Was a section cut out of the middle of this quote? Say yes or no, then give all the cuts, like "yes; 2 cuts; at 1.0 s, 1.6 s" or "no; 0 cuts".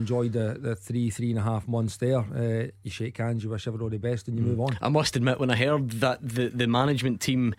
no; 0 cuts